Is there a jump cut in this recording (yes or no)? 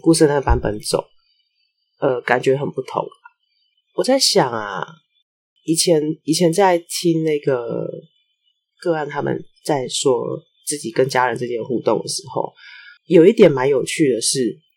yes